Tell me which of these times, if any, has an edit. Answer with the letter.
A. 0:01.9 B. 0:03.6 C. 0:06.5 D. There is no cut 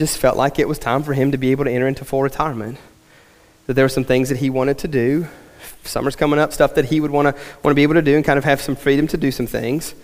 C